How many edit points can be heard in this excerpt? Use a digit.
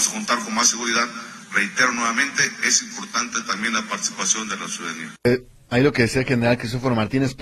1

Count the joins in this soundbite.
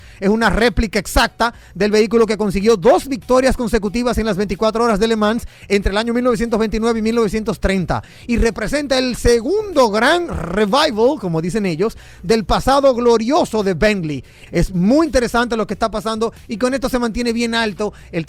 1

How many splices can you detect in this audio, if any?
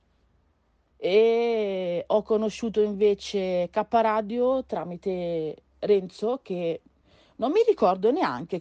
1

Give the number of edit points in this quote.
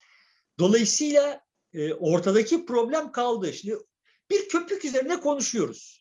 0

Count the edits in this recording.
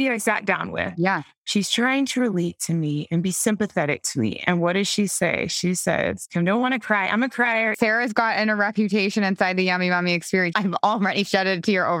2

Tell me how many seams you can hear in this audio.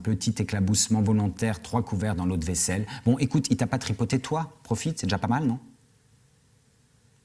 0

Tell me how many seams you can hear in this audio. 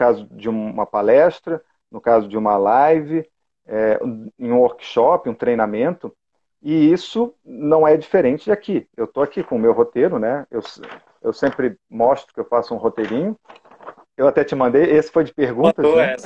0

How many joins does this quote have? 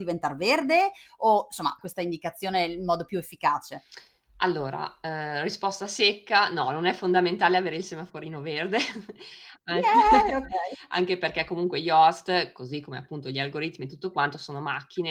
1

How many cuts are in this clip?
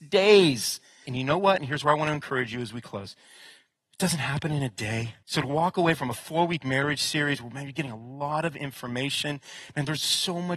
2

